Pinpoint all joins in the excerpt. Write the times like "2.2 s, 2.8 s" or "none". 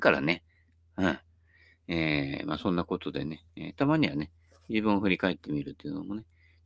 none